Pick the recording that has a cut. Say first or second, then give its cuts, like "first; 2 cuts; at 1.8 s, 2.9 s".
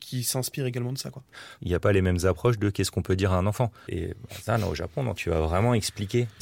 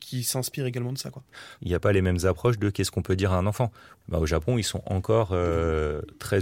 first; 2 cuts; at 3.9 s, 5.2 s